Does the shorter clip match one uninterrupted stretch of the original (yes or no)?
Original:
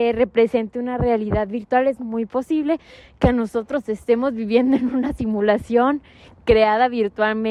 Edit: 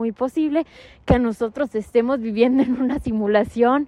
yes